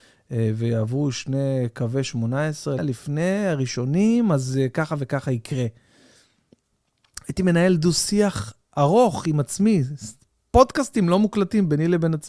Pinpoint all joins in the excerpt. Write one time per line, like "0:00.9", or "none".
0:02.8